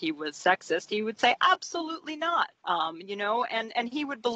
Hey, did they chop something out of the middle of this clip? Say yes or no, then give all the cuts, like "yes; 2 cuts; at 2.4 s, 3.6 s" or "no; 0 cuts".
yes; 1 cut; at 2.6 s